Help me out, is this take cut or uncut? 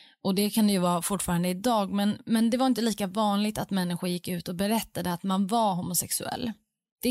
uncut